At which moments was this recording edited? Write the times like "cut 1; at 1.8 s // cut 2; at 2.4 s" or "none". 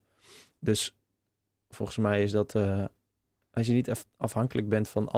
none